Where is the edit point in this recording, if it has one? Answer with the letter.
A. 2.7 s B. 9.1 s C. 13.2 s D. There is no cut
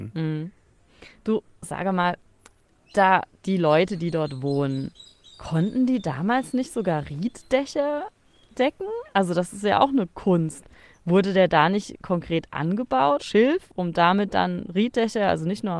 C